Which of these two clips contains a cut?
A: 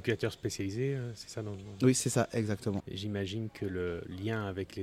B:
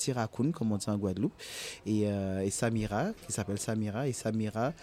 A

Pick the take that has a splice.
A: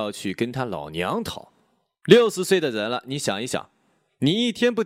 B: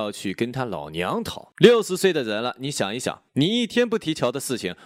B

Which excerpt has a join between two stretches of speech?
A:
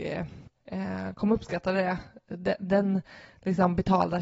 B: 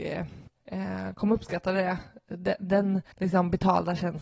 B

